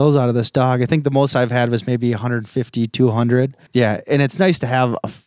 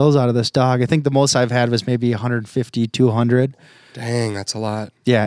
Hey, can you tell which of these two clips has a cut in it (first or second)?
first